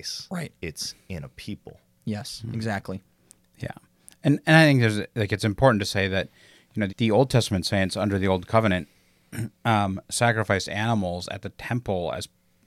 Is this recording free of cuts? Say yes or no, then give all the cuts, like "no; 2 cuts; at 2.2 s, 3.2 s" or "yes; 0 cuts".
no; 1 cut; at 6.9 s